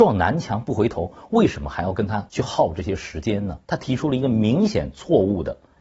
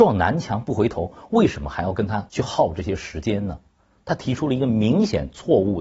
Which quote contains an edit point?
first; 1 cut; at 3.6 s

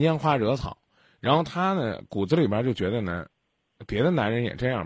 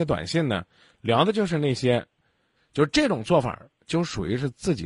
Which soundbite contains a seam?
second; 1 cut; at 2.5 s

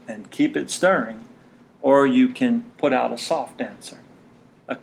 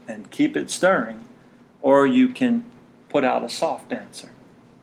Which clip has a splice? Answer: first; 1 cut; at 2.7 s

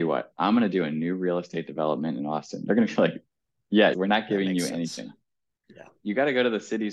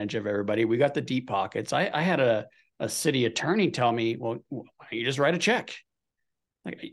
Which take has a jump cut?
first; 1 cut; at 3.9 s

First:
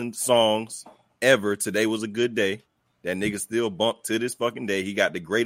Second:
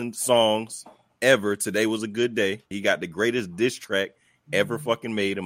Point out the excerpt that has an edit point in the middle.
second; 1 cut; at 2.7 s

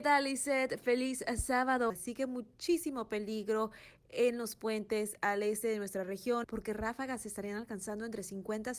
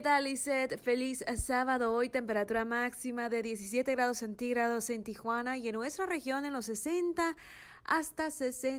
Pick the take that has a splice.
first; 2 cuts; at 1.9 s, 6.4 s

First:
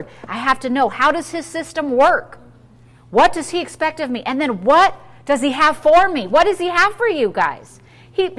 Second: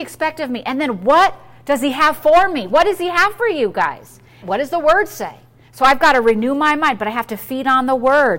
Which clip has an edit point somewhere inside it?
second; 1 cut; at 4.4 s

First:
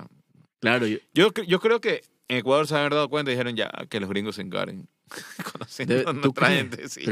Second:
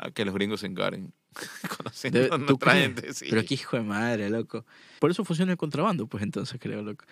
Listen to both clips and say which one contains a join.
second; 1 cut; at 5.0 s

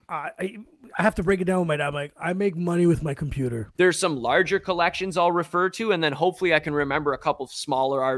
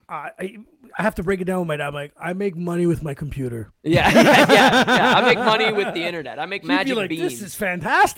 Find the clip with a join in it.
first; 1 cut; at 3.7 s

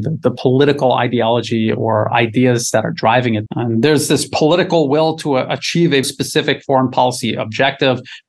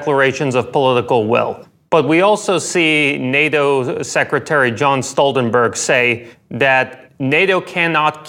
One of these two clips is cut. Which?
first; 2 cuts; at 3.5 s, 6.0 s

